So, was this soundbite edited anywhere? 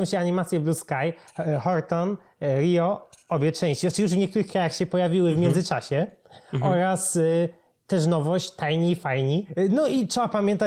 no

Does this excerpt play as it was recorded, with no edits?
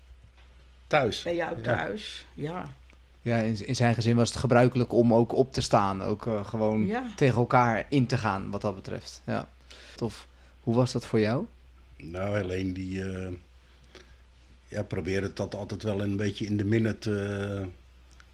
no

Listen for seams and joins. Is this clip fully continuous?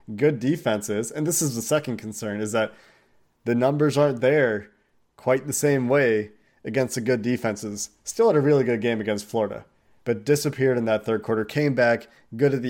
no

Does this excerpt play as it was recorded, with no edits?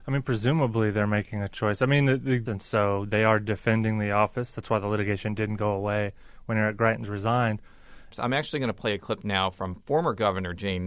no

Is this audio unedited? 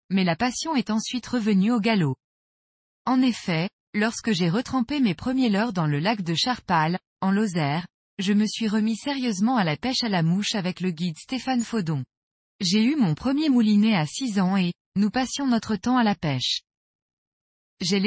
no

